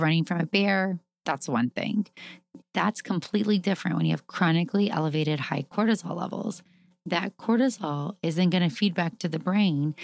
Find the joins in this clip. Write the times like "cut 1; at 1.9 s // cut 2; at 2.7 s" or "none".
cut 1; at 2.6 s